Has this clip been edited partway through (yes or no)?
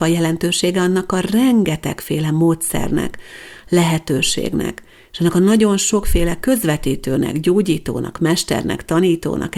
no